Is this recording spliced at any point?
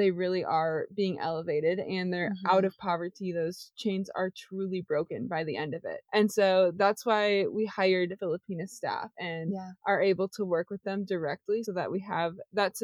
yes; 1 cut; at 11.7 s

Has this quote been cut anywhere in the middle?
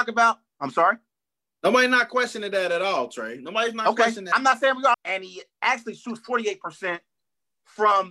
yes; 1 cut; at 4.9 s

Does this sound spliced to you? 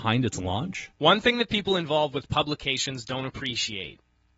yes; 1 cut; at 0.9 s

